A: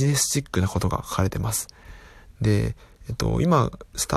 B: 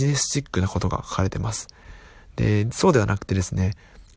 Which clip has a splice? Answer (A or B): A